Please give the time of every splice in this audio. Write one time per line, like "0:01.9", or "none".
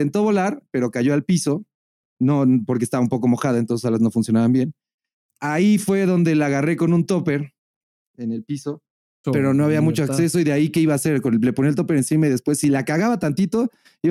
0:09.2